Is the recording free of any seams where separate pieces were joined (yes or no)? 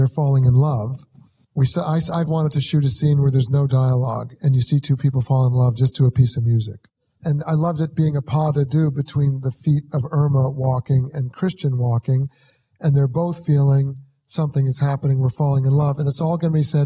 no